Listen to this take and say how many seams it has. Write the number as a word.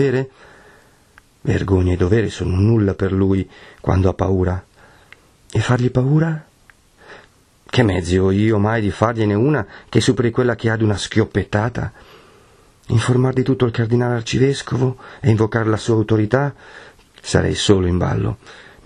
one